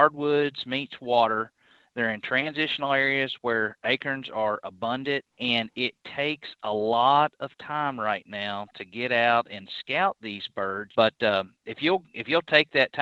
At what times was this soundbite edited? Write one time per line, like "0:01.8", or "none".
0:05.3
0:10.9